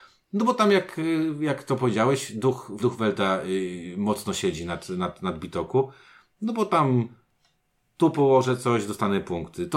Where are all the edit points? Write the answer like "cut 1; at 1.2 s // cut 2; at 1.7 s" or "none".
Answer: cut 1; at 2.8 s